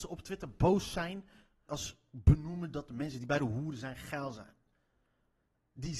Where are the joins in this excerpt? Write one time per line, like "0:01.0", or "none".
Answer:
0:01.7